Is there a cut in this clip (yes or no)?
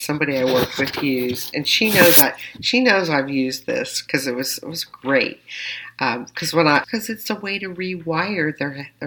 yes